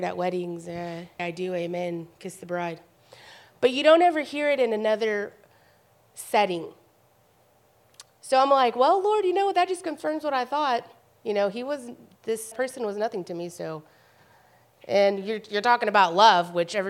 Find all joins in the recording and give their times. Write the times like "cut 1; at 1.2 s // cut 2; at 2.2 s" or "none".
cut 1; at 1.2 s // cut 2; at 12.5 s